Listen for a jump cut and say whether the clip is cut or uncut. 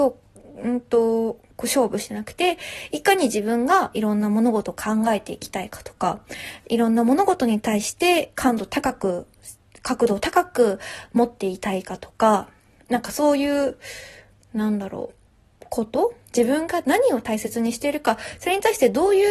uncut